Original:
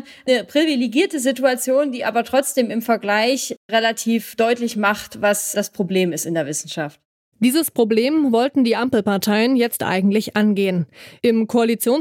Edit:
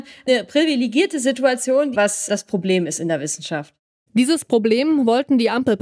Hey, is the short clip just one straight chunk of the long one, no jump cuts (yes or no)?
no